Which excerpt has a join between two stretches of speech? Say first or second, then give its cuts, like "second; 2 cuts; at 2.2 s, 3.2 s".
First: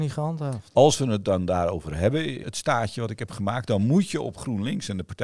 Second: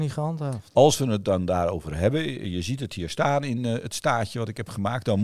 first; 1 cut; at 2.4 s